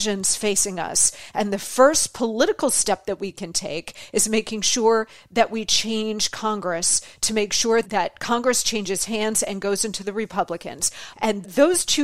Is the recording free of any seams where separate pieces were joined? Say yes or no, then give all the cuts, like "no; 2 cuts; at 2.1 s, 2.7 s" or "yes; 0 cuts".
no; 1 cut; at 11.1 s